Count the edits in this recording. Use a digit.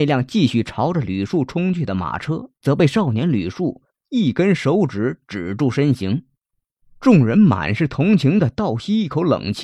0